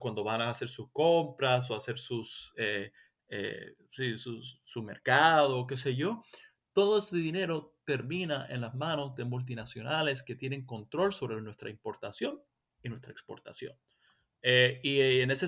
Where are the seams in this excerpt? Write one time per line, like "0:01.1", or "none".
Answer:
none